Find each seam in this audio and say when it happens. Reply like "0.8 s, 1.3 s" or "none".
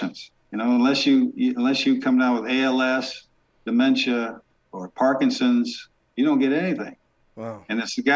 none